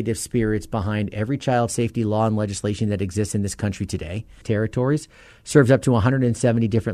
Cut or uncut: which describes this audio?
cut